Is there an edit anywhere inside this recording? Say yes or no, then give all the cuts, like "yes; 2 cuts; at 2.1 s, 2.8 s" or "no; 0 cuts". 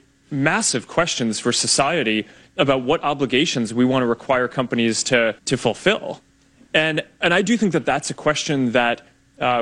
yes; 1 cut; at 5.4 s